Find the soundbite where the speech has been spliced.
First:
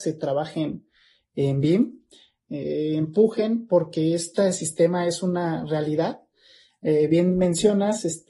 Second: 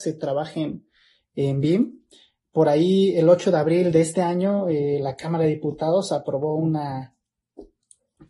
first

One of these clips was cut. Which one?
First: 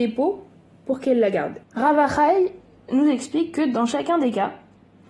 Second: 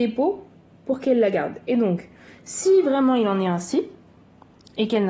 first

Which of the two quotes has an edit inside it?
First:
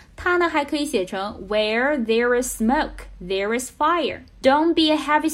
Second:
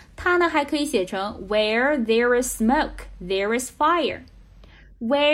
first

